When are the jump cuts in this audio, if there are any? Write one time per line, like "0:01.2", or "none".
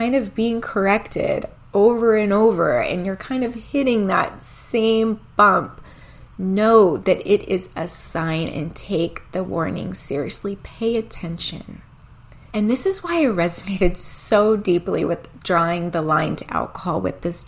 0:12.5